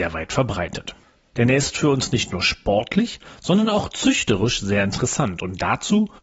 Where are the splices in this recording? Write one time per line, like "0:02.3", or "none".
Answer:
0:01.3